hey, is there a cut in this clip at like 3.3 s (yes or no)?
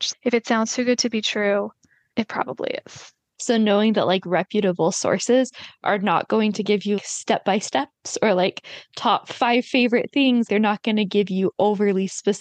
yes